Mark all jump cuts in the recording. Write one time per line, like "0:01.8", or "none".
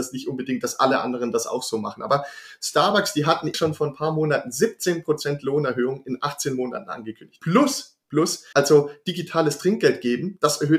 0:03.5
0:07.4
0:08.5